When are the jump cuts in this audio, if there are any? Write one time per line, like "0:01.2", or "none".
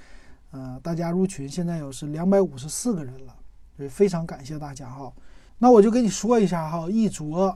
0:05.5